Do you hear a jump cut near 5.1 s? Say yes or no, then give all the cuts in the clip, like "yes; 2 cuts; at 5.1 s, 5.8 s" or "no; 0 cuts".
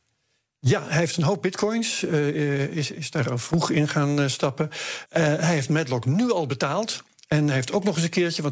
yes; 1 cut; at 5.1 s